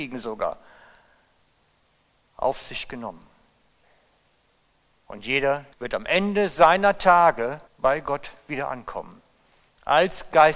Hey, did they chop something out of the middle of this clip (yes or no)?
yes